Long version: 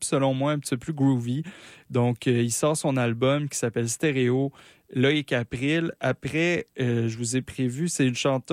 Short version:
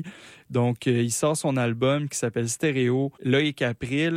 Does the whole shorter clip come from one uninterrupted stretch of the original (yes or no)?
no